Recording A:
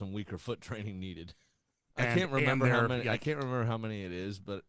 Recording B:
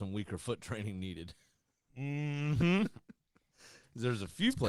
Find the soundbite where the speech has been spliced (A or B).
A